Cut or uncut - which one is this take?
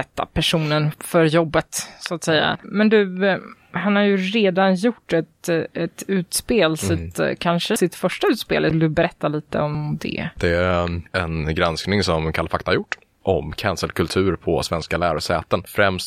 uncut